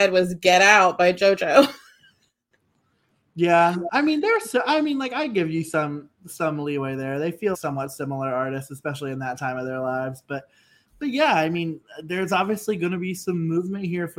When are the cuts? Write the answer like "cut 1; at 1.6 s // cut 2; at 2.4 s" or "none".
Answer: cut 1; at 7.5 s